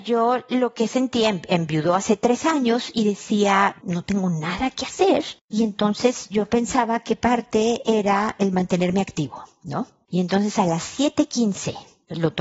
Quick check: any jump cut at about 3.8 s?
yes; 1 cut; at 3.8 s

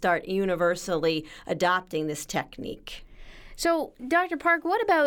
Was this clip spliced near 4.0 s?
yes; 1 cut; at 4.0 s

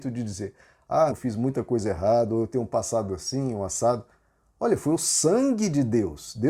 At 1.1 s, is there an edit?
yes; 1 cut; at 1.1 s

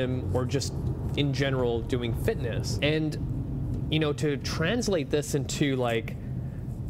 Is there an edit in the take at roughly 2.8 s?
yes; 1 cut; at 2.8 s

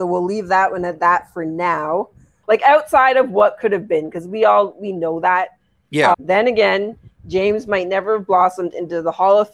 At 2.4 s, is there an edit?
yes; 2 cuts; at 2.4 s, 6.1 s

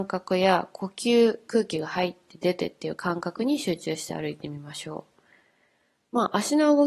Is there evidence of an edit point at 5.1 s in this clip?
no; 1 cut; at 1.5 s

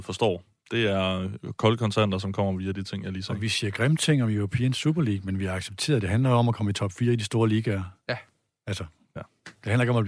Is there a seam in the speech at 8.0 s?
no; 0 cuts

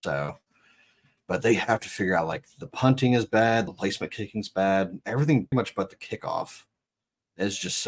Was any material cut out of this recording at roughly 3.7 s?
yes; 2 cuts; at 3.7 s, 5.5 s

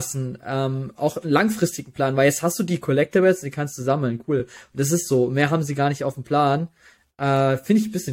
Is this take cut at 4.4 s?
no; 0 cuts

